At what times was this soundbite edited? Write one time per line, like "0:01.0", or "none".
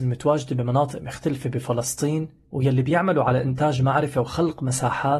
none